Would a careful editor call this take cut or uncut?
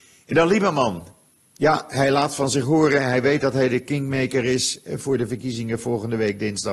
uncut